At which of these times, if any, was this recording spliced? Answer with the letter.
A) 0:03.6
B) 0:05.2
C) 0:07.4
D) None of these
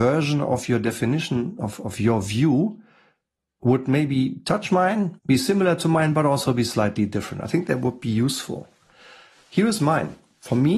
B